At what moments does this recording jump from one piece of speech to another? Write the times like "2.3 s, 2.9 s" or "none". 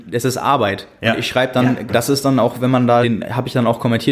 1.9 s, 3.0 s